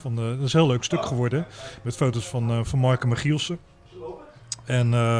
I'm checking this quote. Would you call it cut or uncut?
uncut